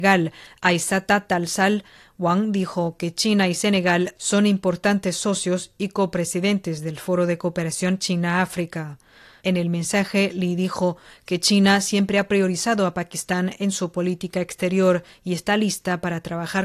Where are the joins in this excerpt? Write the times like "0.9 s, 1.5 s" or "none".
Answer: 9.4 s